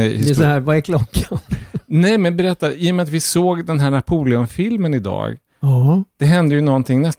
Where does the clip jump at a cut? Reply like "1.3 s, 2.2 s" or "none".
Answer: none